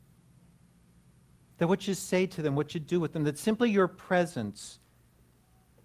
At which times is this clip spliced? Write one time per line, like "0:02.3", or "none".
0:01.4